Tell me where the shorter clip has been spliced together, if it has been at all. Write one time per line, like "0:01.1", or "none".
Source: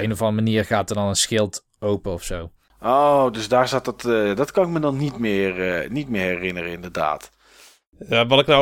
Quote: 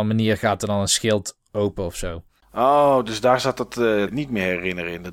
0:04.1

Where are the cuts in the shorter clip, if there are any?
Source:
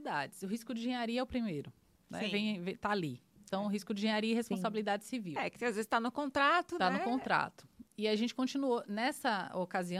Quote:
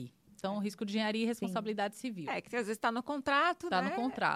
none

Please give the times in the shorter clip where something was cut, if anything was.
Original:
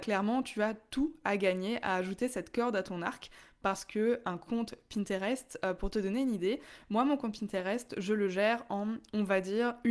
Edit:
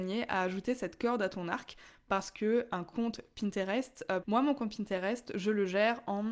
0:04.2

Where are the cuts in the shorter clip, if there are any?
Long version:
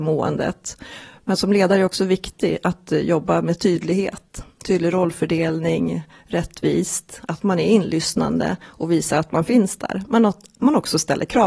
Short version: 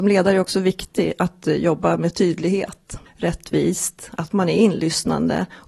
0:03.1

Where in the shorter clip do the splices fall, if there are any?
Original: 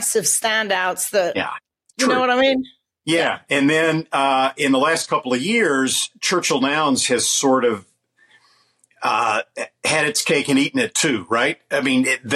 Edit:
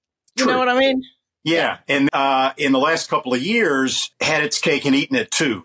0:02.1
0:04.1

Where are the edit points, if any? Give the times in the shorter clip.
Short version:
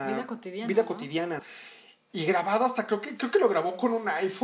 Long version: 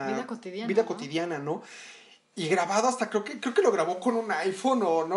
0:01.4

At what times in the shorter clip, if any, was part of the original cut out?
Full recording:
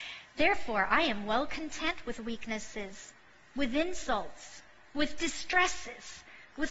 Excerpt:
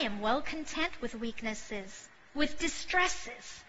0:02.3

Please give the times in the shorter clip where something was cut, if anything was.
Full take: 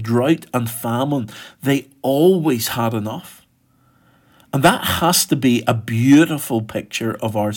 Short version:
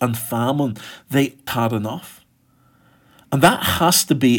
0:01.5

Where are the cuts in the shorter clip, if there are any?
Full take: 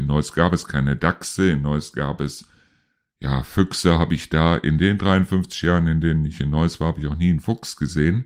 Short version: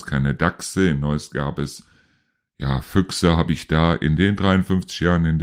none

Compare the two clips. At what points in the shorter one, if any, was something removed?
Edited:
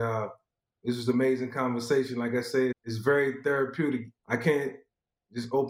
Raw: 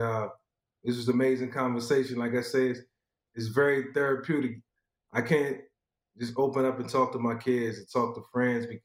0:02.7
0:04.2

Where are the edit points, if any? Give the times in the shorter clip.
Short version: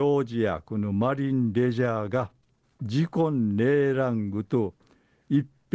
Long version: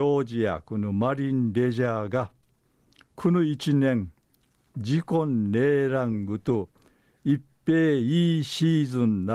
0:02.6

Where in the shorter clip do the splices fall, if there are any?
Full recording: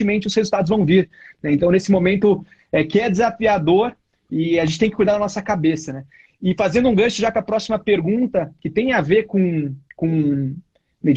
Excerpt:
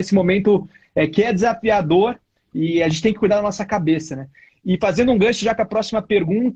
none

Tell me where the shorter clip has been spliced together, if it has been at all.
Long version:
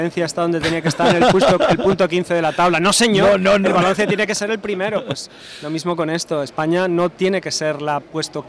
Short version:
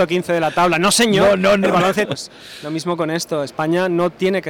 0:02.1

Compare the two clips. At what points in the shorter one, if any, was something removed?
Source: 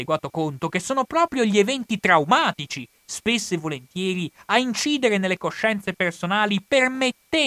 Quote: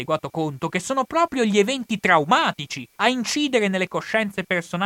0:03.0

